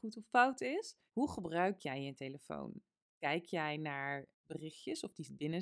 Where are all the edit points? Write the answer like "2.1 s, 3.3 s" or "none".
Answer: 1.1 s, 3.0 s